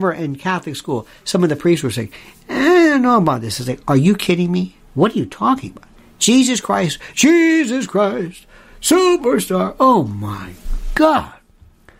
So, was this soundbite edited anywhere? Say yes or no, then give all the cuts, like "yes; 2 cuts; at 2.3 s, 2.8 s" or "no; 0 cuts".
no; 0 cuts